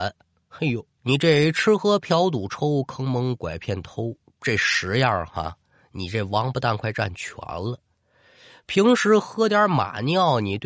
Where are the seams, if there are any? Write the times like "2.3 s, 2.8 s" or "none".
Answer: 1.0 s